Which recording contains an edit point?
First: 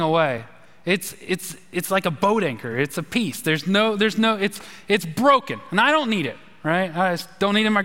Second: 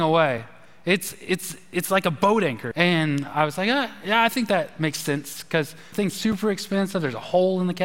second; 2 cuts; at 2.7 s, 5.9 s

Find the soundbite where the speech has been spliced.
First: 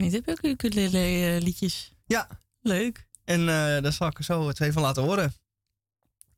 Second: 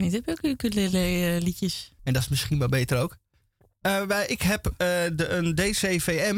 second; 1 cut; at 2.0 s

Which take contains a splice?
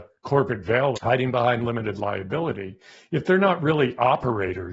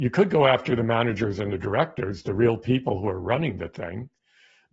first; 1 cut; at 0.9 s

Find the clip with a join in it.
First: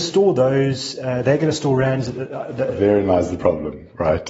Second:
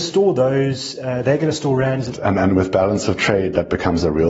second; 1 cut; at 2.1 s

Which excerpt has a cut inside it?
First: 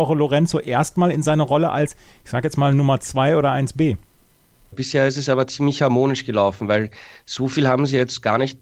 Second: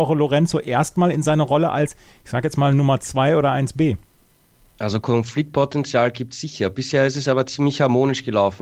first; 1 cut; at 4.7 s

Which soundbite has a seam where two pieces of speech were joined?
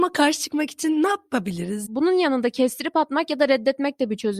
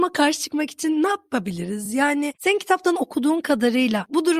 first; 1 cut; at 1.8 s

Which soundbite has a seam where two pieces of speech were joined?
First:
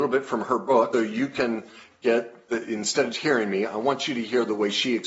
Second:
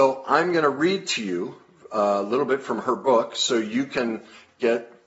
first; 2 cuts; at 0.9 s, 3.1 s

